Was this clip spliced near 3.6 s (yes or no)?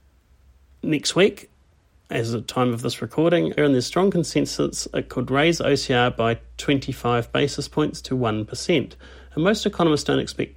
yes